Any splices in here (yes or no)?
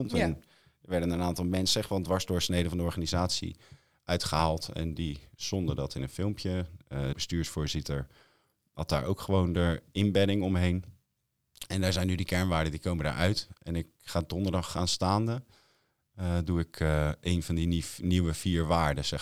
yes